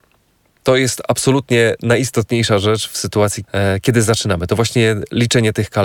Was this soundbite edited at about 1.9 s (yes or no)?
no